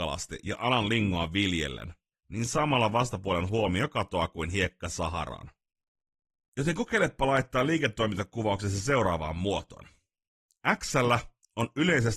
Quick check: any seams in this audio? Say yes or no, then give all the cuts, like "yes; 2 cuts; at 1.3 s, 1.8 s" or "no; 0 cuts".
yes; 1 cut; at 2.1 s